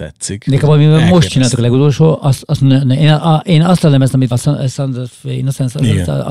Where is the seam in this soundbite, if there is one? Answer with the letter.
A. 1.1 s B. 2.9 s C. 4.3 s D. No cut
C